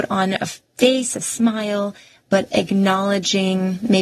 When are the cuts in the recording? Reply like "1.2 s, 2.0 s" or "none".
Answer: none